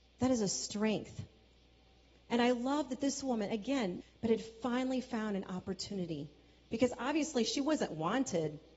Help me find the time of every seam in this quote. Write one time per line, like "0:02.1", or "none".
0:04.0